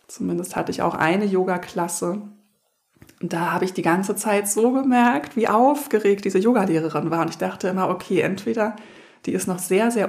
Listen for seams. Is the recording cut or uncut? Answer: uncut